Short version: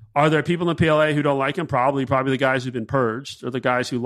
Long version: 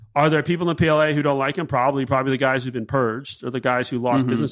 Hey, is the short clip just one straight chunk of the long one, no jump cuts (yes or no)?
yes